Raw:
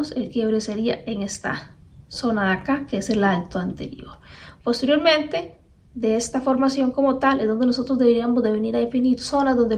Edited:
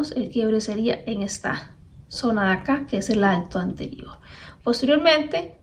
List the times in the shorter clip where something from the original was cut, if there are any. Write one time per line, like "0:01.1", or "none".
none

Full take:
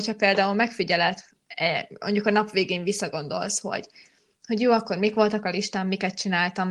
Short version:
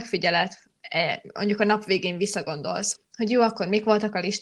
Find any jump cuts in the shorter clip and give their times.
0:03.0

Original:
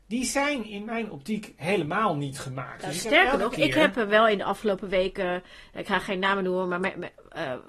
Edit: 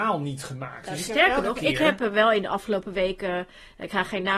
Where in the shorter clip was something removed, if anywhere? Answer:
none

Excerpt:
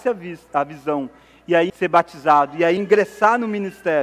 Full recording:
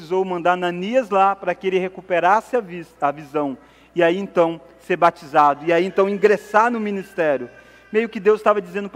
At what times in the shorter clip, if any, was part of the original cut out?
0:01.7
0:02.8

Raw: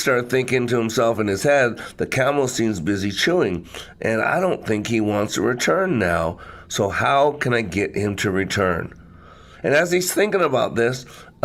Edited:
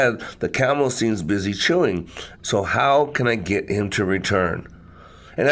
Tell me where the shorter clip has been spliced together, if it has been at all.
0:02.4

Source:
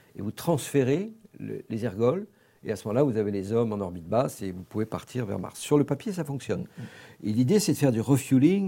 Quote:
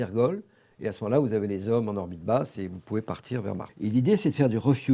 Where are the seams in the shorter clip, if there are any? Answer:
0:03.7

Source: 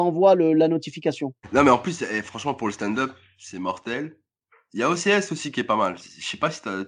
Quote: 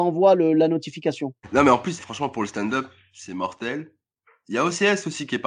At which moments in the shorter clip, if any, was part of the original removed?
0:02.0

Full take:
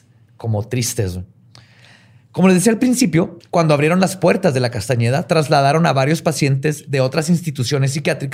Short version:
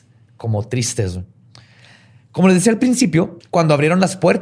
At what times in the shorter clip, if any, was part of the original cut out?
none

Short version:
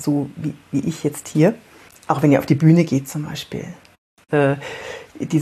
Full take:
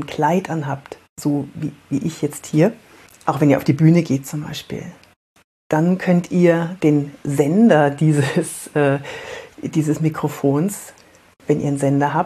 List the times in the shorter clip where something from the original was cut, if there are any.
0:04.3

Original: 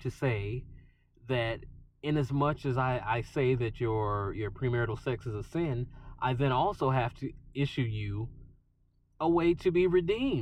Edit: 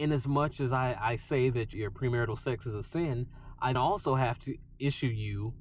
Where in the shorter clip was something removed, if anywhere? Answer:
0:01.7
0:03.8

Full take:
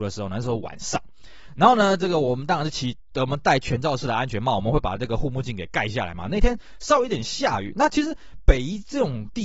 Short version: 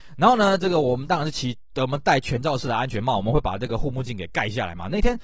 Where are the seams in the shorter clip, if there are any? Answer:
none

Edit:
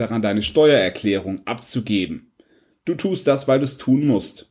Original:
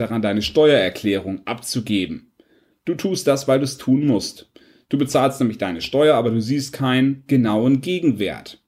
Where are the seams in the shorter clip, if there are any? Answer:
none

